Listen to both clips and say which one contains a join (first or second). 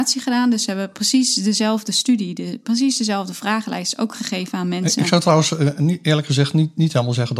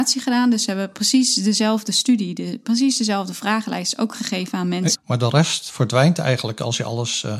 second